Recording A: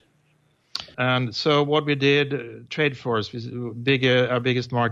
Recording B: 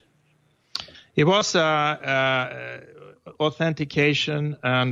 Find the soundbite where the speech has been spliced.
A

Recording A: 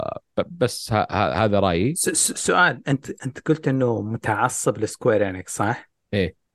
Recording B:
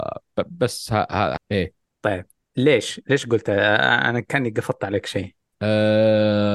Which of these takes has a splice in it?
B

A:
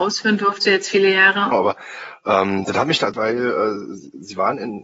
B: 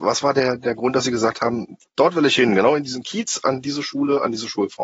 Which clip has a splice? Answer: A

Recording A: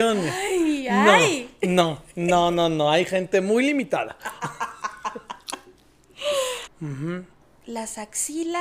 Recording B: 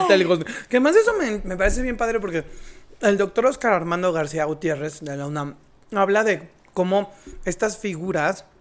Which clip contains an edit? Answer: A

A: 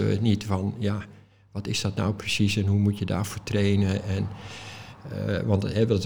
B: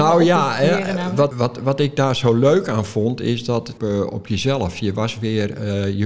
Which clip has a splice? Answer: B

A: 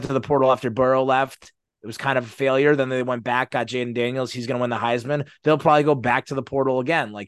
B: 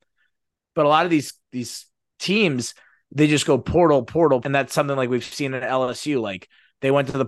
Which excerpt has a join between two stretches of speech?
B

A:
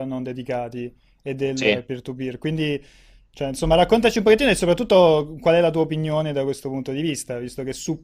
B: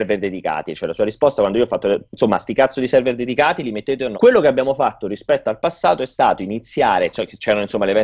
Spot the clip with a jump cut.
B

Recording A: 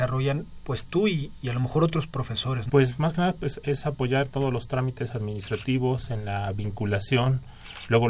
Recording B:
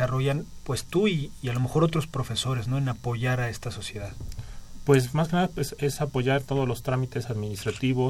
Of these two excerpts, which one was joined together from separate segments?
A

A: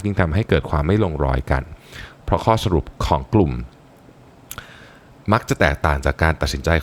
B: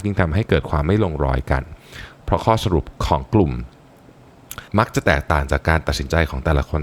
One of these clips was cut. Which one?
B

